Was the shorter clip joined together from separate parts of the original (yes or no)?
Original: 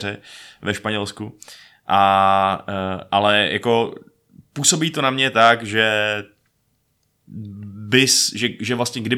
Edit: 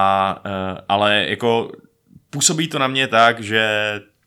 no